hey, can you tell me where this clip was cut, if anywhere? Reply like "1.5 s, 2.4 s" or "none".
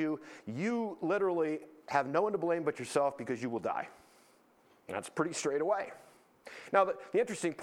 none